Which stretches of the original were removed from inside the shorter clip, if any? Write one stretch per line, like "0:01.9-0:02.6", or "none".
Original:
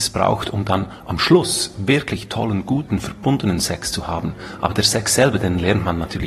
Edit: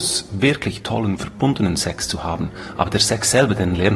0:02.6-0:03.0